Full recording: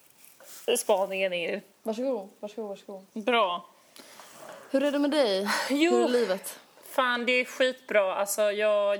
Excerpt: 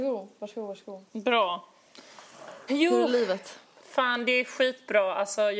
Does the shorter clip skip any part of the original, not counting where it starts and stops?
yes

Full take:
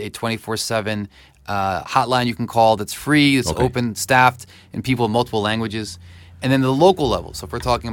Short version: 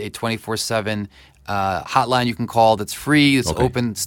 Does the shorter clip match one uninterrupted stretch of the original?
yes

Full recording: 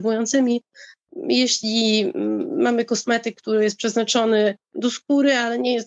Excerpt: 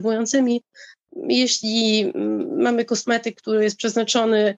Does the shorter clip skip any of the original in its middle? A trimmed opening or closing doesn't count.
no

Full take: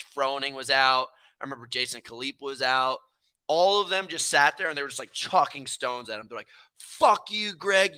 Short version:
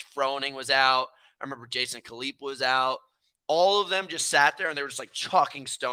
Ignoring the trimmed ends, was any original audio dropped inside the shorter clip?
no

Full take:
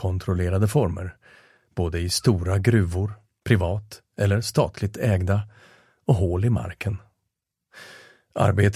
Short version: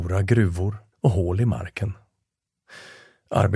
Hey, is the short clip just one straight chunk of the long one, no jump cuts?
no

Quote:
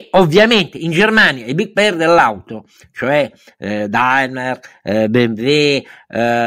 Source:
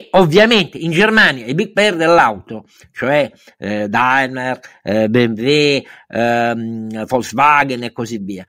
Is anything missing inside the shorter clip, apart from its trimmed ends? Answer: no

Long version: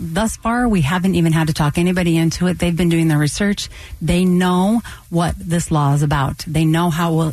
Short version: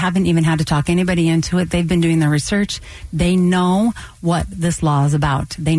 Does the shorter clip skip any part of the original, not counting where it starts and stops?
no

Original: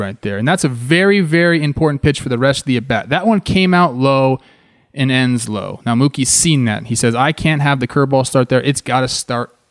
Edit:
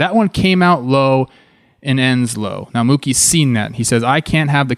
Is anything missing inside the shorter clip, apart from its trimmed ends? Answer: no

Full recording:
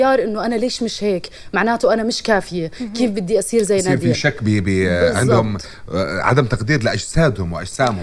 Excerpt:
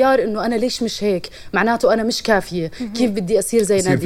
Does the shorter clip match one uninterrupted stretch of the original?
yes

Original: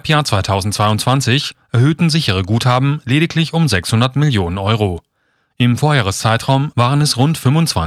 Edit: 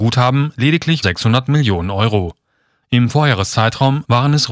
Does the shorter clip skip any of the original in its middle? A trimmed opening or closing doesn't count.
yes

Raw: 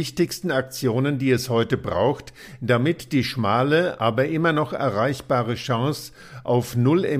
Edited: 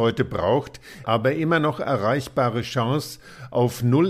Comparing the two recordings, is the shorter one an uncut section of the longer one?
no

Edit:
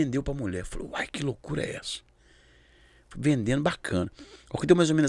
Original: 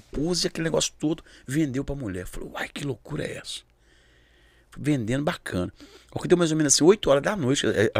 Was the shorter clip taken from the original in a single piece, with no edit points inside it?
yes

